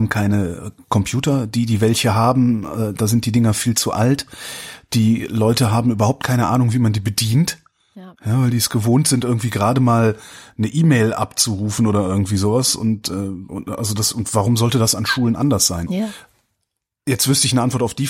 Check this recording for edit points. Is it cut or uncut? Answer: uncut